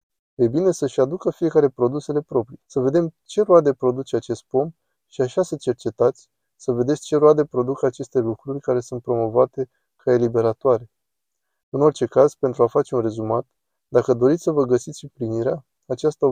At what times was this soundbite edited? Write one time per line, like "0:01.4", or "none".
0:02.6

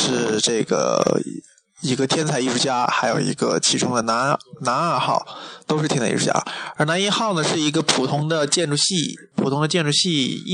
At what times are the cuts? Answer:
none

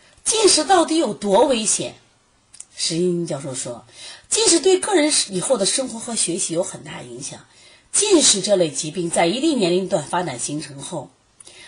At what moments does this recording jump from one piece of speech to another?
none

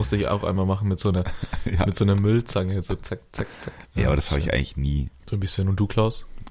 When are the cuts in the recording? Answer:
0:03.9
0:05.2

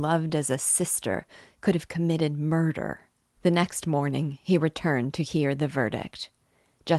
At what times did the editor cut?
0:03.4

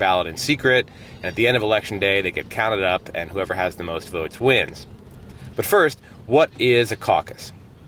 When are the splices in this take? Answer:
0:05.5

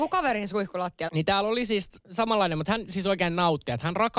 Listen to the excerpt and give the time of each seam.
0:01.1

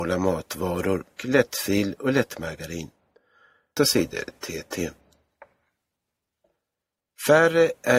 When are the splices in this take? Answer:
0:01.2
0:03.8

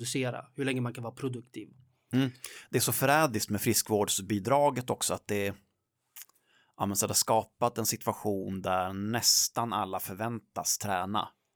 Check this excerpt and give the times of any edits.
none

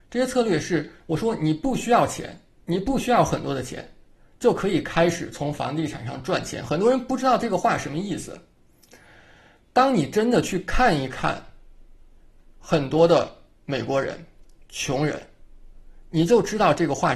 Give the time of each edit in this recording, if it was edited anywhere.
none

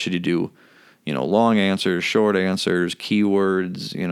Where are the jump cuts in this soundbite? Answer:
none

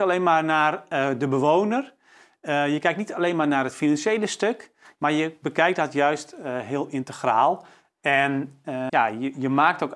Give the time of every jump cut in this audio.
0:05.0
0:08.9

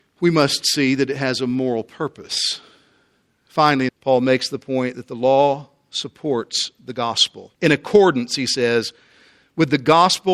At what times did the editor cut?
0:03.9
0:07.5

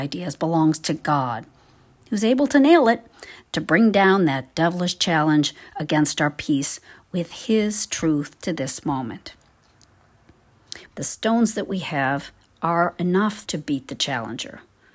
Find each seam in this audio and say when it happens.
0:10.9
0:13.5

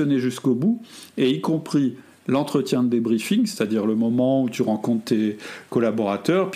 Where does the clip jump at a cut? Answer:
none

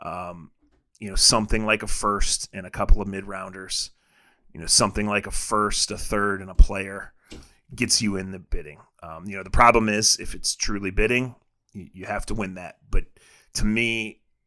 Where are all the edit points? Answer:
none

